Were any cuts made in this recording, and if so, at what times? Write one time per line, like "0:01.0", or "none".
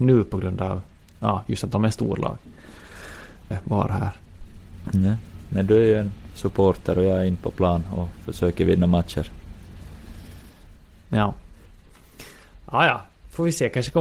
0:03.5